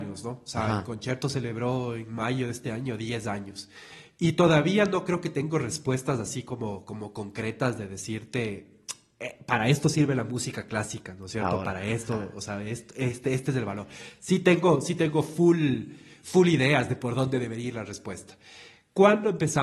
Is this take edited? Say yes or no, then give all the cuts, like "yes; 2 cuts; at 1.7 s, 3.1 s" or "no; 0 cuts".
no; 0 cuts